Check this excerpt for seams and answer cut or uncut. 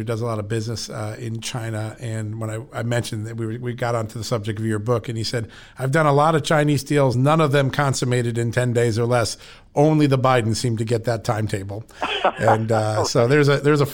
uncut